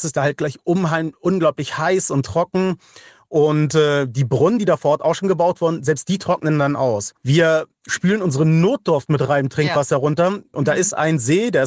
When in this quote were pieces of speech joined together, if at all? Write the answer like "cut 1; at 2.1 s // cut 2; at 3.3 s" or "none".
cut 1; at 7.2 s // cut 2; at 10.5 s